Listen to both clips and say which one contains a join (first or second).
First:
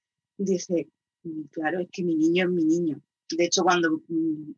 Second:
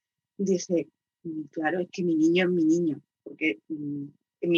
second